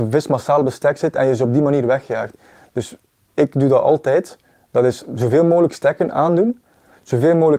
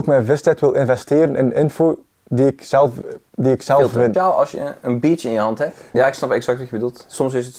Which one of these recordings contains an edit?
second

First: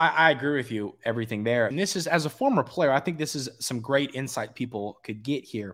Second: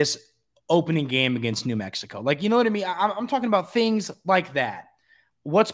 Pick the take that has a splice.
first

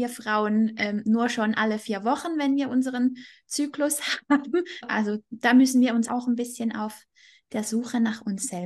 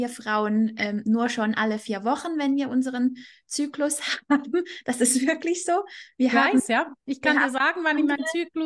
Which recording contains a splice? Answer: first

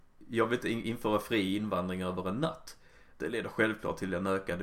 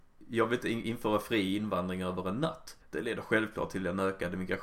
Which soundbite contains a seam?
second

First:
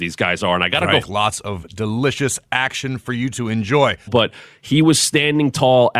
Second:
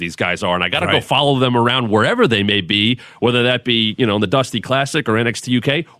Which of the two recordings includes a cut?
first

